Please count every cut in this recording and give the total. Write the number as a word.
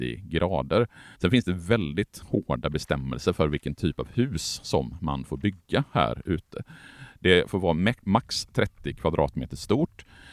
one